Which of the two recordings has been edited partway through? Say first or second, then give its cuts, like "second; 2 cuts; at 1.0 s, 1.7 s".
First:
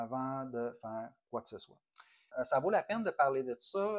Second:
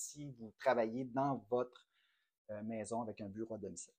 first; 1 cut; at 2.3 s